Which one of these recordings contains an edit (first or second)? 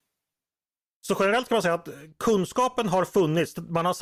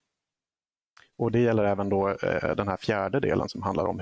second